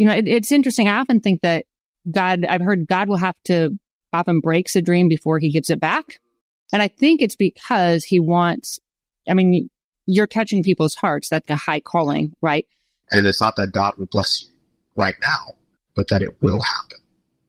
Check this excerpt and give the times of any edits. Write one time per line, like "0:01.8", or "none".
0:11.5
0:13.0